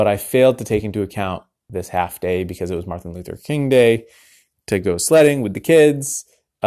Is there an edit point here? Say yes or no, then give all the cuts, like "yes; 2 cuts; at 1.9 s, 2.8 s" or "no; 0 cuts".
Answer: yes; 1 cut; at 1.7 s